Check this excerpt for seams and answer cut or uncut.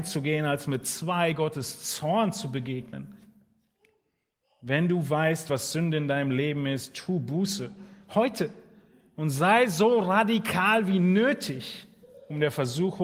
uncut